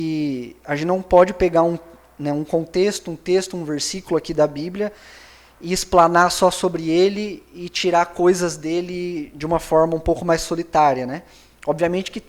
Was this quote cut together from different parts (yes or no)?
no